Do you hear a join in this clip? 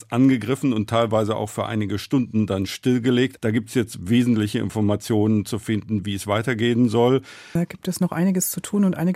yes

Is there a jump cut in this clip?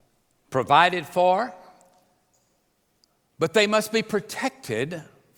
no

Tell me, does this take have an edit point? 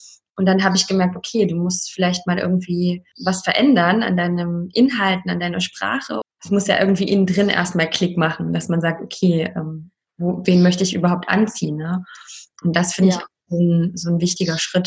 yes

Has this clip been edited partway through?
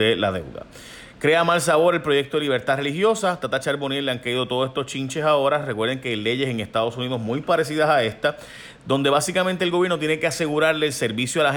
no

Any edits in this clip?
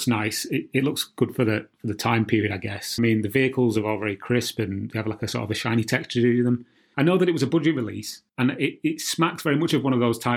yes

